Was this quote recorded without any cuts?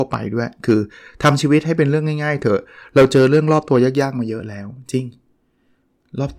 yes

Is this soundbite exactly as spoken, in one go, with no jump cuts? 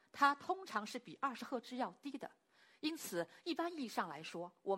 yes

